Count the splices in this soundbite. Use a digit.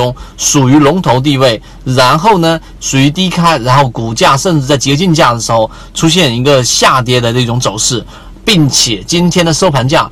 1